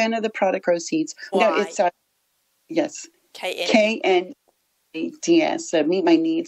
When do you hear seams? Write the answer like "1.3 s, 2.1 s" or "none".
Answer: 1.3 s